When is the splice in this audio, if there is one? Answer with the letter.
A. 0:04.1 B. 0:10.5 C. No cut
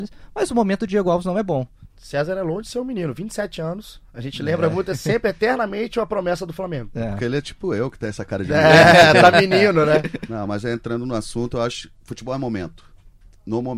C